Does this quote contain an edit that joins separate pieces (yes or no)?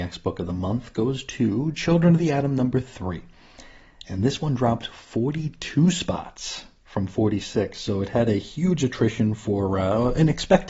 no